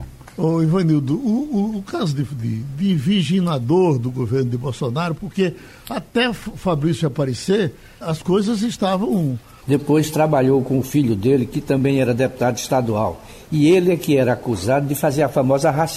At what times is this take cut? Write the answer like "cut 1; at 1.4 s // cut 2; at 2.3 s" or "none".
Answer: cut 1; at 2.6 s // cut 2; at 8.0 s // cut 3; at 9.6 s